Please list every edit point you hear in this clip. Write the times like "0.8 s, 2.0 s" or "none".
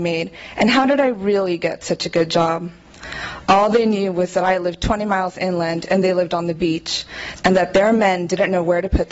7.4 s